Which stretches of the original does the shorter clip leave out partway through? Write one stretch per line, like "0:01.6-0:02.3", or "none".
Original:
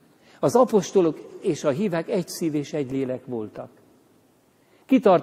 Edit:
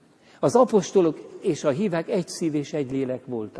none